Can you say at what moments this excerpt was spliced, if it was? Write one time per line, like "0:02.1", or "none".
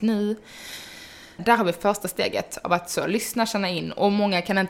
0:01.4

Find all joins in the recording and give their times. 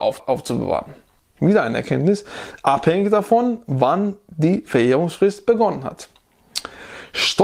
none

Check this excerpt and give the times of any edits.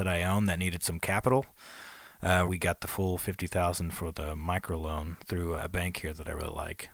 0:02.5
0:05.6

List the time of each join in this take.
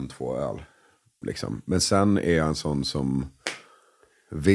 0:01.2

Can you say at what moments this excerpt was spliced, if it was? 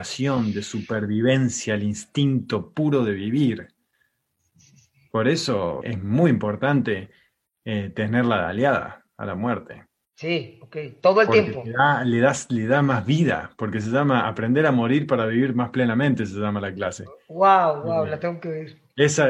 0:05.8

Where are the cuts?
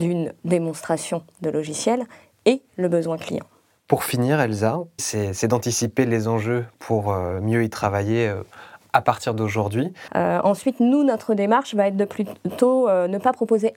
0:05.0
0:10.1

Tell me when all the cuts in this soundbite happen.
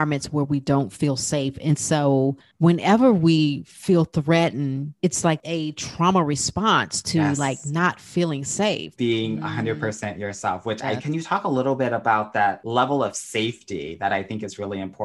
0:05.0
0:09.0
0:11.0

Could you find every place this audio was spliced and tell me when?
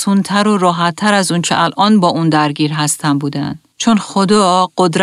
0:03.7

